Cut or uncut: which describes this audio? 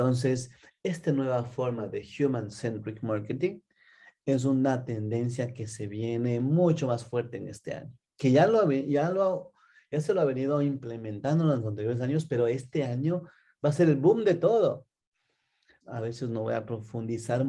cut